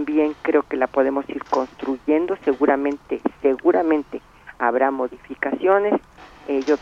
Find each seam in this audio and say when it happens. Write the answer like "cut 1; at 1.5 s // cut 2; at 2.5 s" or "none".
none